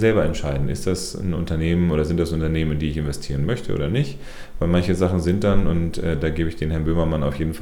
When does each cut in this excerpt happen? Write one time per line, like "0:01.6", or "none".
none

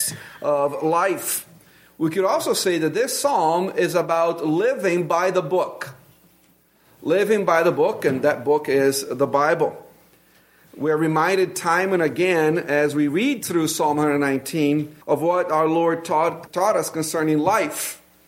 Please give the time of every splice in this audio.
0:15.0
0:16.5

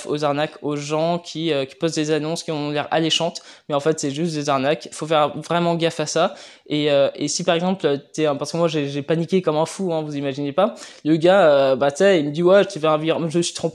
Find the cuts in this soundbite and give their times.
none

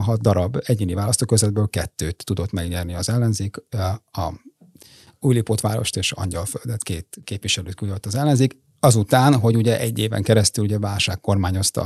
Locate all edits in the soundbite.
none

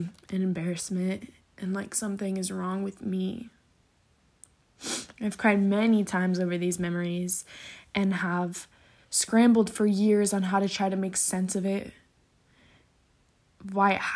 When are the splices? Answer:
none

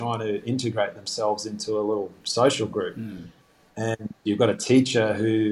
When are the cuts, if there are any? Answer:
none

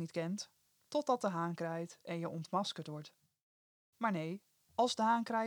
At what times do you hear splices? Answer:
0:03.9

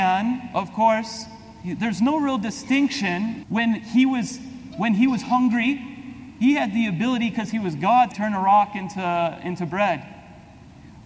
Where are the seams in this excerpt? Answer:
0:03.4
0:08.1

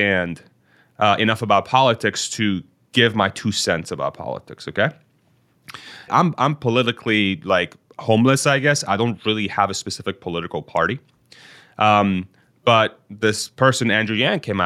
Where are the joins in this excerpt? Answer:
0:06.1

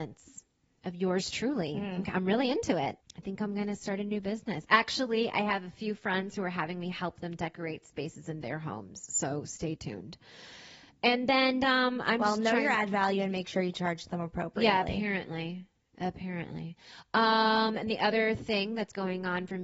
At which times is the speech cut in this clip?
0:03.0

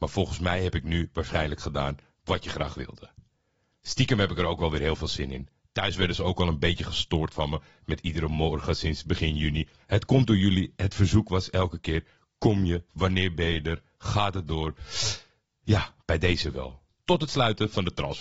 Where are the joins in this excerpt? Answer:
0:09.8
0:16.9

